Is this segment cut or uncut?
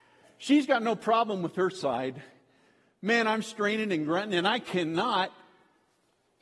uncut